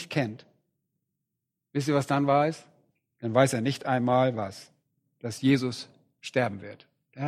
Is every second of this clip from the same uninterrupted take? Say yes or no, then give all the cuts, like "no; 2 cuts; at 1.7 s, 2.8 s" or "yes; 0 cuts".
yes; 0 cuts